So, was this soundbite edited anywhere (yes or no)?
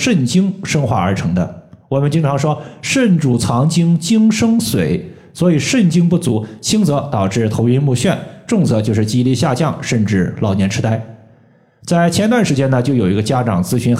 no